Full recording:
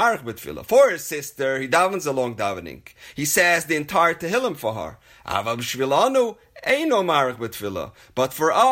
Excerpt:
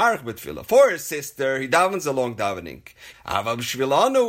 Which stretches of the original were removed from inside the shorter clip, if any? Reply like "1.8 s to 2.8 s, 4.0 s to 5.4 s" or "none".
3.1 s to 5.1 s